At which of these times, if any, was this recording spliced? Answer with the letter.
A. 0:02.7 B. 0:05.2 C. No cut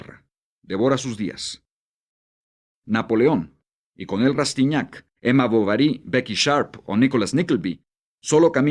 B